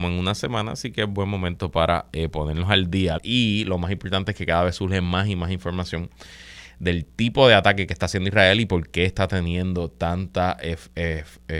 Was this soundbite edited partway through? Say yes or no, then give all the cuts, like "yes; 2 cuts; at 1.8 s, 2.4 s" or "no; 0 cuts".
yes; 1 cut; at 3.2 s